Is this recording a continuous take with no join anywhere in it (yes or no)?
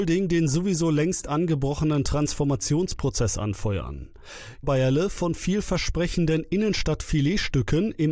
no